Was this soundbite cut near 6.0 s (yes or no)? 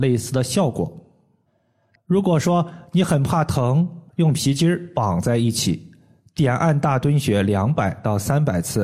no